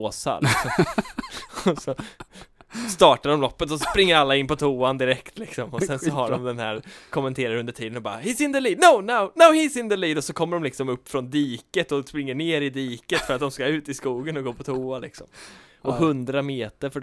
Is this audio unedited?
yes; 0 cuts

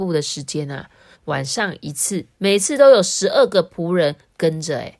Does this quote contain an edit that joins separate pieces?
yes; 2 cuts; at 1.1 s, 2.3 s

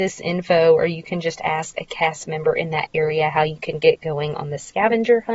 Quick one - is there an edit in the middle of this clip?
no; 0 cuts

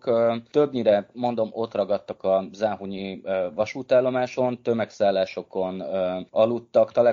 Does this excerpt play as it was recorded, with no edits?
yes; 0 cuts

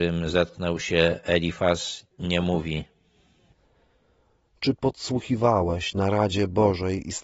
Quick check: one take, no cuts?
yes; 0 cuts

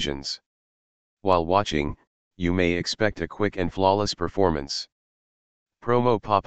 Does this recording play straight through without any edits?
no; 1 cut; at 1.0 s

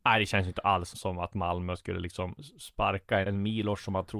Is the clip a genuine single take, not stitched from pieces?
no; 2 cuts; at 0.9 s, 3.2 s

